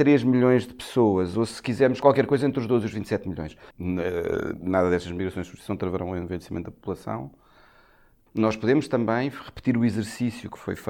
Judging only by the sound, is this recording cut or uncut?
cut